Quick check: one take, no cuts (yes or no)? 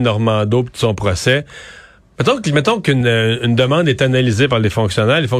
no